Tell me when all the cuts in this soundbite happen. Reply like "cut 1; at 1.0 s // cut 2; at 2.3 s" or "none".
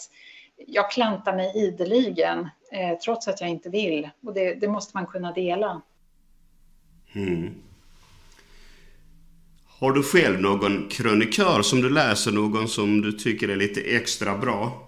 none